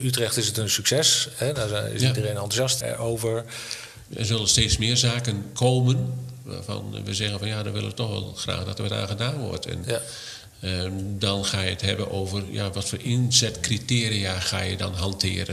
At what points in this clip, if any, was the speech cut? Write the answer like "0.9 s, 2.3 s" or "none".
2.8 s, 4.1 s